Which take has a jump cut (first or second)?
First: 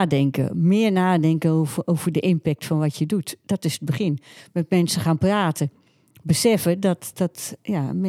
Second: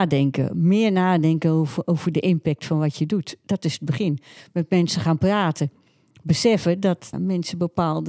second